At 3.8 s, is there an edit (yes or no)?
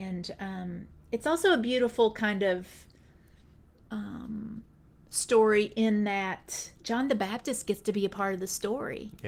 no